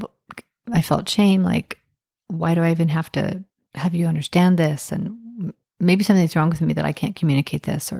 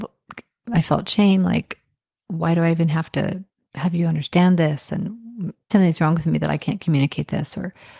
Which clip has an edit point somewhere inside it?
second; 1 cut; at 5.7 s

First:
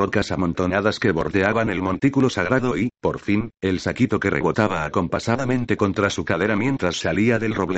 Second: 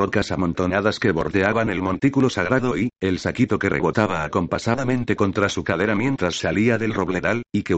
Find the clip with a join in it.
second; 1 cut; at 2.9 s

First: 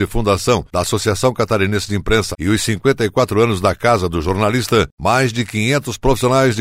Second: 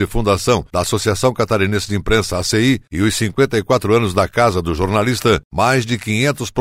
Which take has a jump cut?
first; 1 cut; at 2.3 s

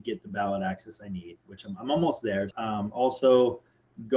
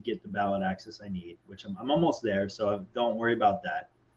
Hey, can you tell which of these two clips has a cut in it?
first; 1 cut; at 2.5 s

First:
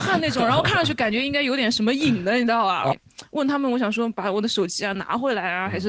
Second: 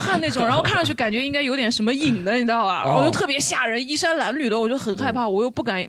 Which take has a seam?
first; 1 cut; at 2.9 s

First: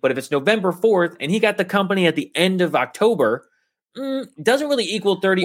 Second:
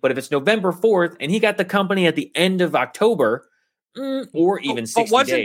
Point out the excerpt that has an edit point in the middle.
second; 1 cut; at 4.3 s

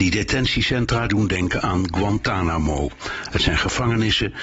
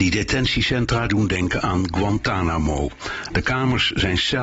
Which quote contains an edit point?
second; 1 cut; at 3.3 s

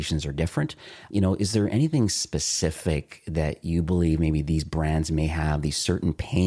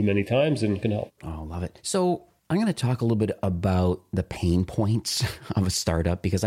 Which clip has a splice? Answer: first; 1 cut; at 1.1 s

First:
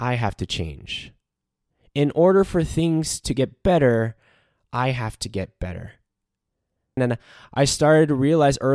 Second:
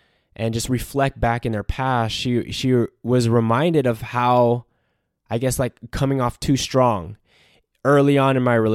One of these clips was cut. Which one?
first; 1 cut; at 7.0 s

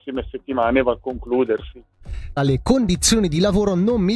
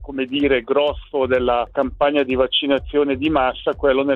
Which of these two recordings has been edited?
first; 1 cut; at 2.4 s

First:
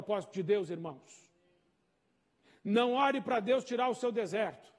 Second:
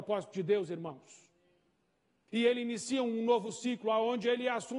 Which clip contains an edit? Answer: second; 1 cut; at 2.3 s

